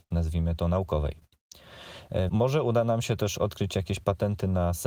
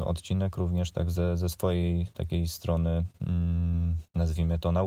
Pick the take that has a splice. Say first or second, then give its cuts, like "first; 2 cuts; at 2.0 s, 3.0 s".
first; 1 cut; at 2.3 s